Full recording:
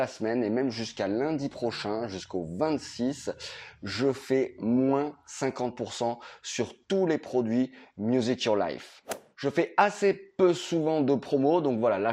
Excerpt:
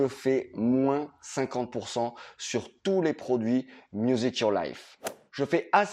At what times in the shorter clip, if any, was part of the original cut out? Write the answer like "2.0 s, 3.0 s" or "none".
none